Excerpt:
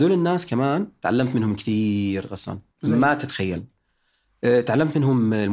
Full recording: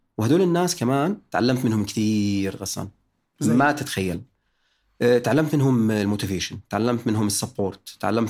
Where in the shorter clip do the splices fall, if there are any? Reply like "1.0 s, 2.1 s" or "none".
2.7 s